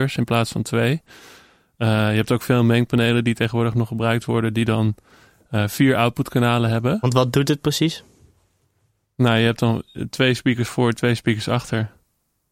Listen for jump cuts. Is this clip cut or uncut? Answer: uncut